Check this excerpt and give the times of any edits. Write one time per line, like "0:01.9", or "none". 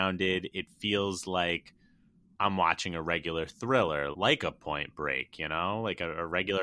0:04.1

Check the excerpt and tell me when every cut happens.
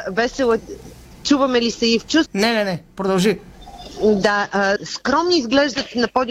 0:02.3
0:04.8

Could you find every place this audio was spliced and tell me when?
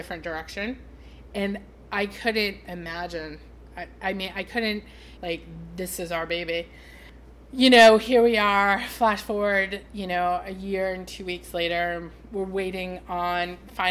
0:05.2

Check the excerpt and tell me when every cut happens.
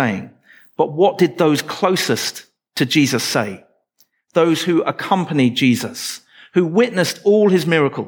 none

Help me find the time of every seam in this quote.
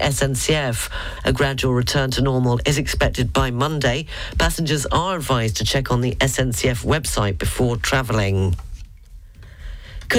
0:01.2

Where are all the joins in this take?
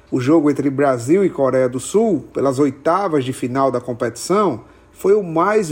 none

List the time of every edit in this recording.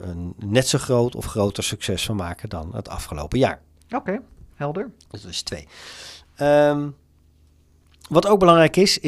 none

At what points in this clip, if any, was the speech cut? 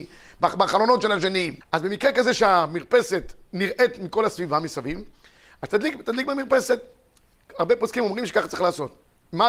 0:01.6

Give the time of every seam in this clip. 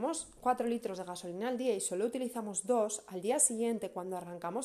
none

